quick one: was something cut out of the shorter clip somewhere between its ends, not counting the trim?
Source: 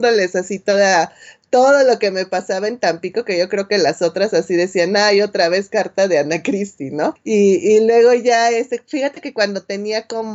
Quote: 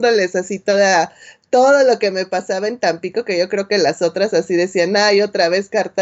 no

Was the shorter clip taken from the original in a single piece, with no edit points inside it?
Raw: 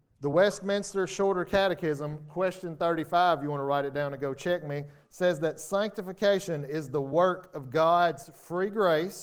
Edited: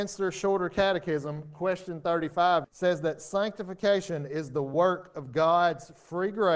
no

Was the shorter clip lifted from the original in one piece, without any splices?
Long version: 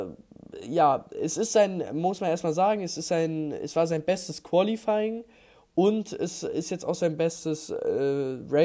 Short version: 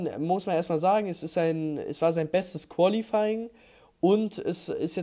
yes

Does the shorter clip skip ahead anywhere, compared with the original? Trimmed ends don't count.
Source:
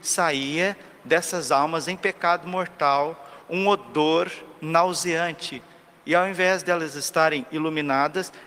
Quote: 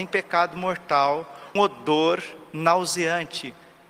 yes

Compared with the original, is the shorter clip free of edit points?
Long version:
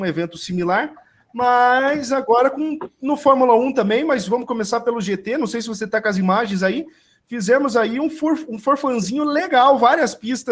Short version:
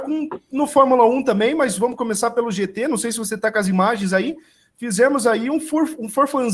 yes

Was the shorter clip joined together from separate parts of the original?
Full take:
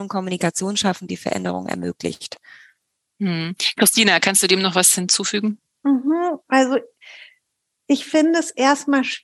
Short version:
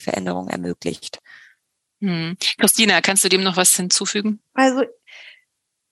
yes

